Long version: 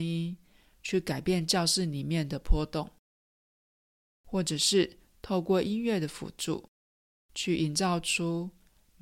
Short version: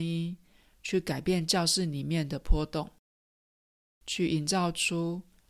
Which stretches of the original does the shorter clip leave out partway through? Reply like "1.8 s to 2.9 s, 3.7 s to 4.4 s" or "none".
3.9 s to 7.1 s